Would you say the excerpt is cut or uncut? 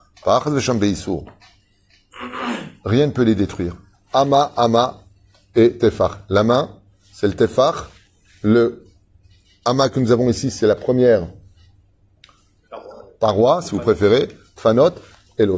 cut